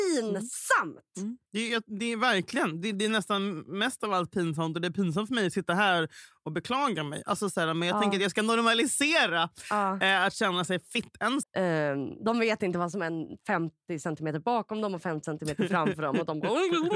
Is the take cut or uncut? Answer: cut